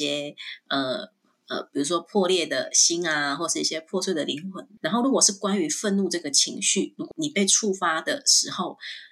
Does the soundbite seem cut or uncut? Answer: cut